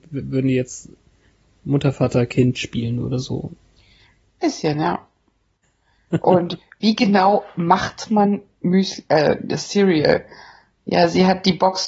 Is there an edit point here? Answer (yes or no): yes